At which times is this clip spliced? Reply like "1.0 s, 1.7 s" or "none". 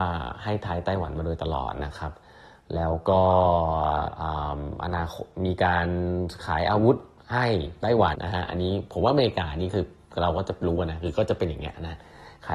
8.1 s